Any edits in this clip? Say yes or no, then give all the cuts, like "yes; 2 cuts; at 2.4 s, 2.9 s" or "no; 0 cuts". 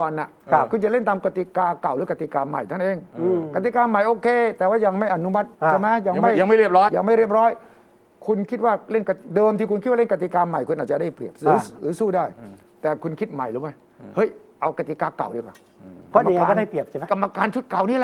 yes; 2 cuts; at 5.6 s, 6.9 s